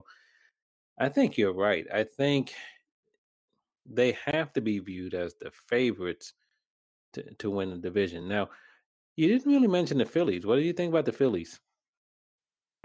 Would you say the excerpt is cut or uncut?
uncut